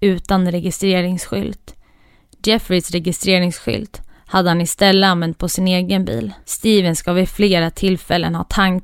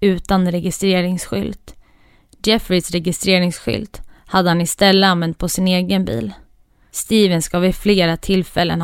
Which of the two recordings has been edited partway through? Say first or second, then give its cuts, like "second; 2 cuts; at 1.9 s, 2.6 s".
first; 1 cut; at 6.4 s